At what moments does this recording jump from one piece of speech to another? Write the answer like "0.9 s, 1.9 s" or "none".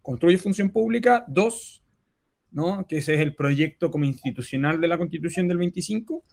2.5 s